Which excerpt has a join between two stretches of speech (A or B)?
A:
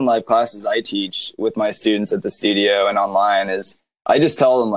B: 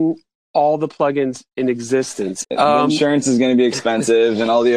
B